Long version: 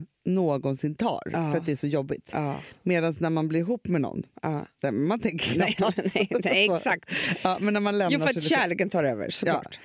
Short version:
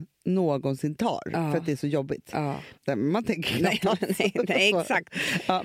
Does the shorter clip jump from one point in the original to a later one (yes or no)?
yes